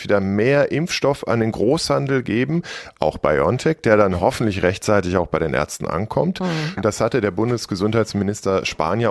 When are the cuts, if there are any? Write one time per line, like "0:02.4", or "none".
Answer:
0:06.8